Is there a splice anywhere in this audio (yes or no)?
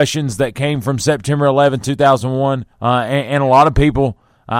yes